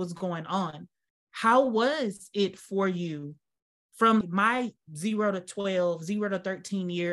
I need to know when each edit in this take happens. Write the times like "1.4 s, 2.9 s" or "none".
1.1 s, 4.2 s

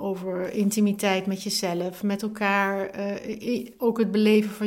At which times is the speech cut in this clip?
none

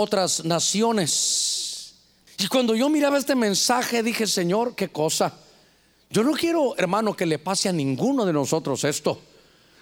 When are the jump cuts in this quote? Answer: 2.3 s

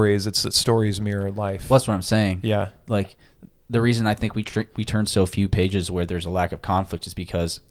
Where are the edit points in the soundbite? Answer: 4.7 s

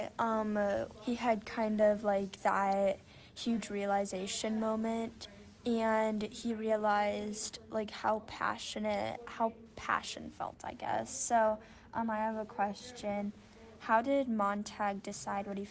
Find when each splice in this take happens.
0.9 s

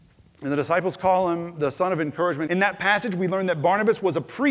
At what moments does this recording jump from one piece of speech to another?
2.5 s

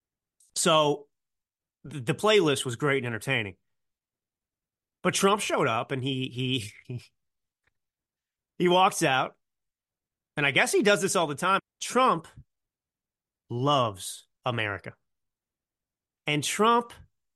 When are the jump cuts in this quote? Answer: 6.8 s, 11.6 s, 14.4 s

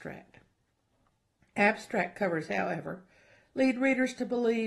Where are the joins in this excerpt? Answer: none

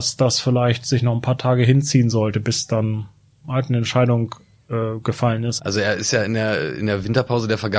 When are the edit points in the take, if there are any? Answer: 5.6 s

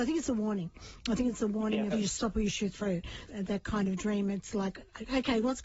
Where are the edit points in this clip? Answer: 1.9 s, 3.3 s

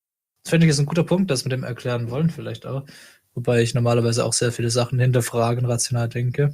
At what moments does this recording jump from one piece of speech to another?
3.2 s

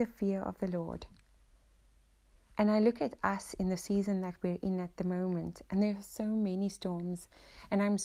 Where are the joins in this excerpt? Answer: none

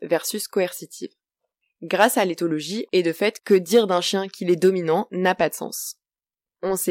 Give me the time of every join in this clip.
2.9 s

